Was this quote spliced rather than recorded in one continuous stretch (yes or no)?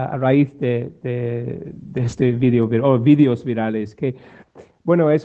no